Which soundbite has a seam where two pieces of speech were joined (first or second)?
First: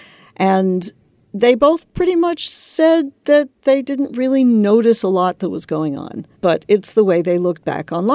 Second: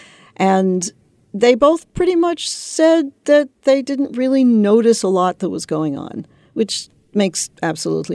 first